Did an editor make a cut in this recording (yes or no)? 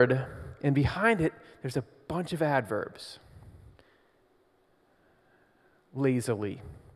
no